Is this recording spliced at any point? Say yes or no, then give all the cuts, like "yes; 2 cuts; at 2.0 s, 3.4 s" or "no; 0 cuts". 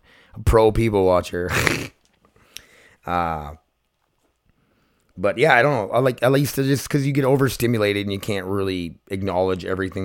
no; 0 cuts